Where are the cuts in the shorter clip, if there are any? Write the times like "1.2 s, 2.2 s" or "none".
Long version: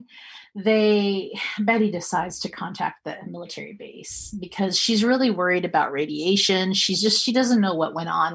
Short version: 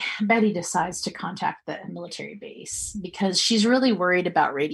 none